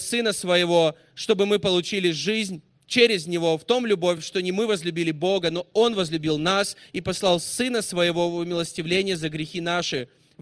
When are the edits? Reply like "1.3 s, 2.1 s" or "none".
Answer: none